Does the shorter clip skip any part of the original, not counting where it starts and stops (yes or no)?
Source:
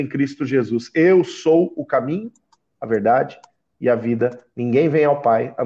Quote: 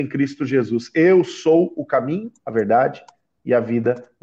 yes